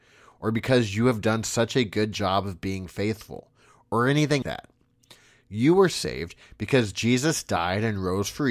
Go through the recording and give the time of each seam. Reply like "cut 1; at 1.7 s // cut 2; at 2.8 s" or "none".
cut 1; at 4.4 s